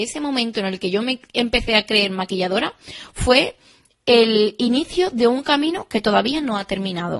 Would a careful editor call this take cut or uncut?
uncut